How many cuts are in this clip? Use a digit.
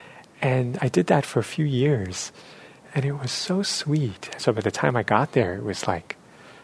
1